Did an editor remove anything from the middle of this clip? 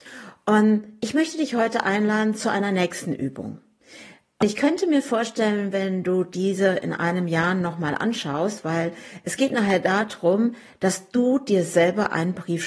no; 0 cuts

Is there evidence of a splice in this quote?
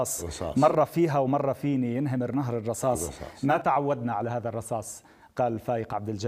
no; 0 cuts

